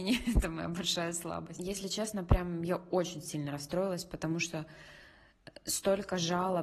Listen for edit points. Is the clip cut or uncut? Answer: cut